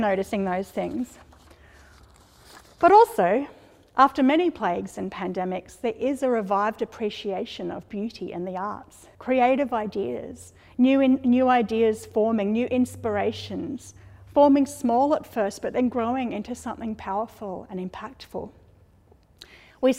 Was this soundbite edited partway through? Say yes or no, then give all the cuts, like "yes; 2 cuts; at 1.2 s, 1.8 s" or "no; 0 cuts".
yes; 1 cut; at 9.1 s